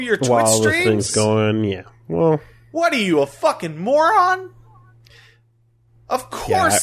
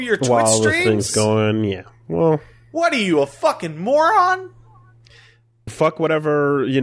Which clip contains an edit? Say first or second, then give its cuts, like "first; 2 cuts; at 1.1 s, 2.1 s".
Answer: second; 1 cut; at 5.7 s